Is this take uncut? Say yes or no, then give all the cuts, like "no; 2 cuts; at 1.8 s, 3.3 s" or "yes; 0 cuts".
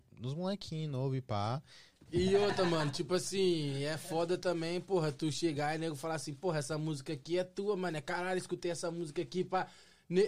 no; 1 cut; at 2.1 s